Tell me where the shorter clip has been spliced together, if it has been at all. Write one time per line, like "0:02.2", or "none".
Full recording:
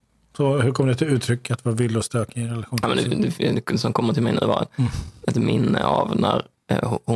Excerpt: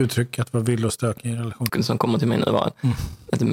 0:01.7